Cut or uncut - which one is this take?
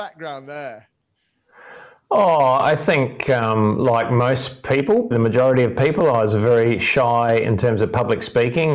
cut